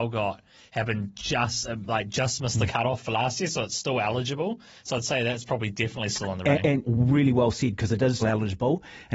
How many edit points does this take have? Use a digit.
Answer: 2